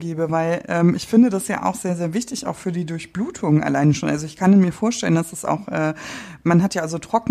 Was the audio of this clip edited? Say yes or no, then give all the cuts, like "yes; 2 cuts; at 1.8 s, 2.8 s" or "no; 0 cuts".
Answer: no; 0 cuts